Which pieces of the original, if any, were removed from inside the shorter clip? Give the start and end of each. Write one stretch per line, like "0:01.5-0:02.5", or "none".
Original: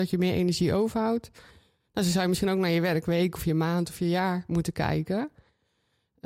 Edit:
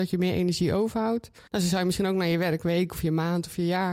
0:01.5-0:01.9